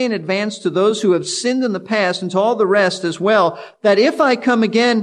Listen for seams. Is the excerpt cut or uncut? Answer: uncut